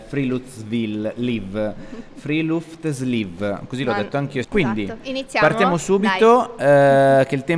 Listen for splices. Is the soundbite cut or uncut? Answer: cut